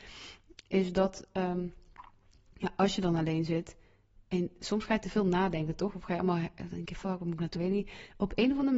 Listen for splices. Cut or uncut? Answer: cut